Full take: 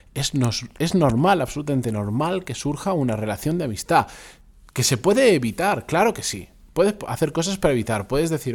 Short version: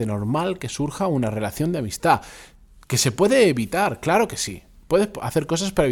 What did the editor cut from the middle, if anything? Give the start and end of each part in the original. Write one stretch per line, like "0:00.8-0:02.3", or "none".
none

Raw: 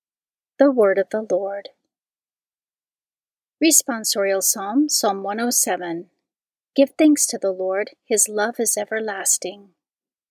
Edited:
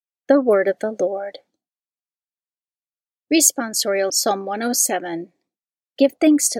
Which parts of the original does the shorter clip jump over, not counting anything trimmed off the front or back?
0:04.4-0:04.9

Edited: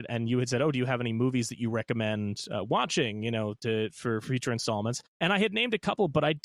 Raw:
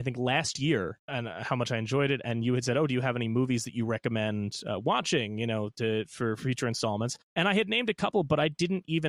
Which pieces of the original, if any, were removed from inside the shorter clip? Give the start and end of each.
none

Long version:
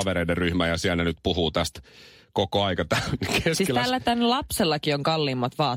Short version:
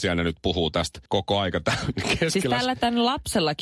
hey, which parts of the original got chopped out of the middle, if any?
0:01.9-0:02.3

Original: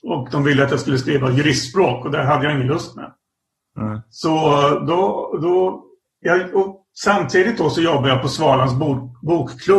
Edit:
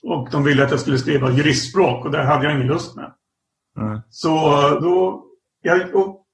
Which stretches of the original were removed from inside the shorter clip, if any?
0:04.8-0:05.4

